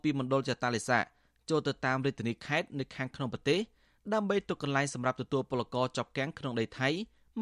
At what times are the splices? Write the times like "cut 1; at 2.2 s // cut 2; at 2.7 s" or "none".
none